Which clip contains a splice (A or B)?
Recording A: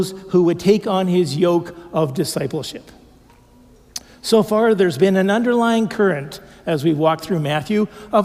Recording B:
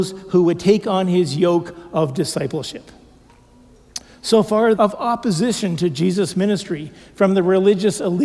B